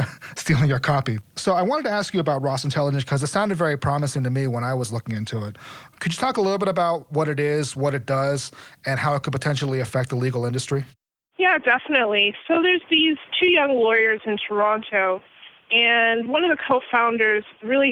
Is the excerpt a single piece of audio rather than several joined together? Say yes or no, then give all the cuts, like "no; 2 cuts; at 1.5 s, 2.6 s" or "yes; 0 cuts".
yes; 0 cuts